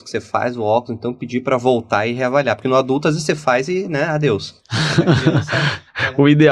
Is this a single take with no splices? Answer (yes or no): yes